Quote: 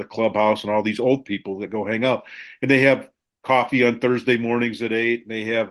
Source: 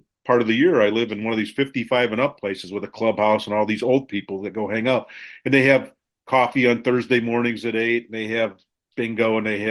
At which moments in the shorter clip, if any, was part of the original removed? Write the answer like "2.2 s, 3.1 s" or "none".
none